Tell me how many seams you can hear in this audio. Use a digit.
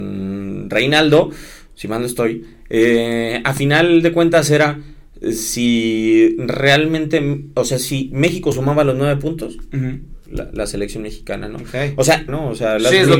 2